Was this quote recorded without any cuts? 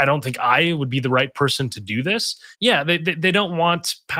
no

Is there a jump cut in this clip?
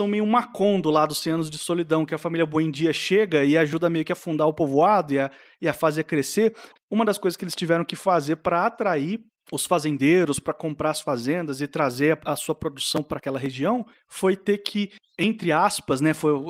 yes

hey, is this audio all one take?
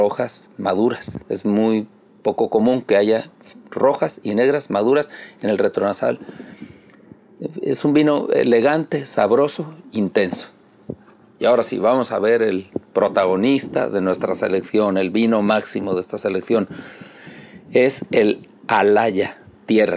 yes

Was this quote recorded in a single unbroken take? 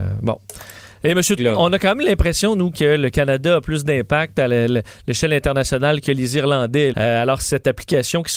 no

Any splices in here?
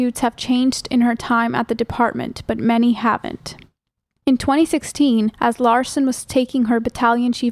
no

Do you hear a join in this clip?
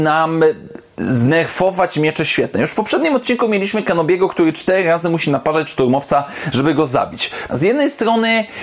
yes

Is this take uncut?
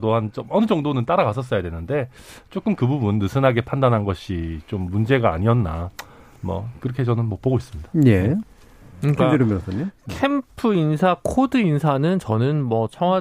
yes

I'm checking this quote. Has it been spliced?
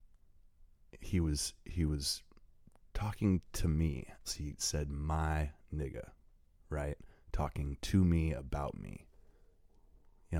yes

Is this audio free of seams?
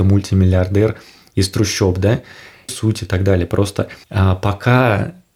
no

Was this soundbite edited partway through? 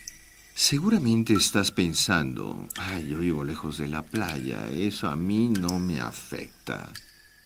no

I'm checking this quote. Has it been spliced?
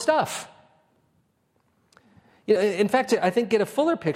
no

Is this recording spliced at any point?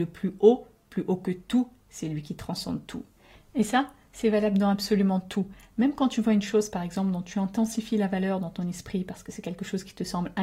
no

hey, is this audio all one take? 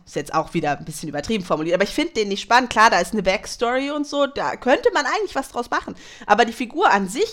yes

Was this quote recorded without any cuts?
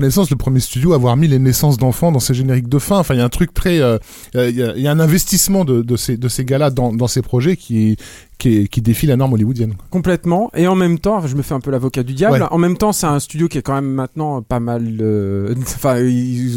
yes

